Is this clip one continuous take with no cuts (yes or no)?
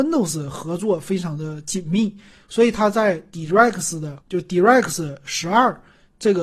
no